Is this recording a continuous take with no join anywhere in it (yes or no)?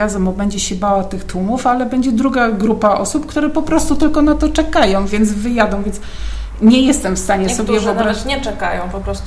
yes